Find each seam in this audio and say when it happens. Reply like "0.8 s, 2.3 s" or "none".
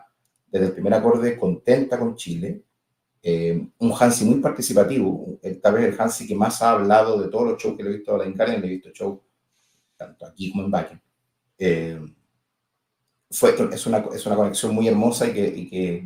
11.5 s, 13.6 s